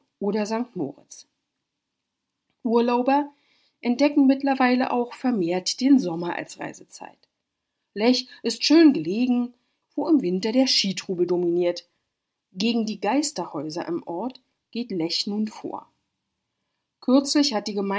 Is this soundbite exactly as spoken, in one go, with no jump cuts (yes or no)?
no